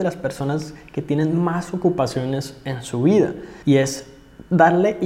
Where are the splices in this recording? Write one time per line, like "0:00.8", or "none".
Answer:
0:03.6